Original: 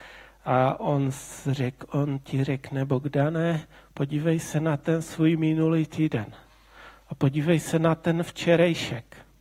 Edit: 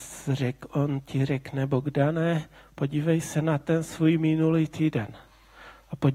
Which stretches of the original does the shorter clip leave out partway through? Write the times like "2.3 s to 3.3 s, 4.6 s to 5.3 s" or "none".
none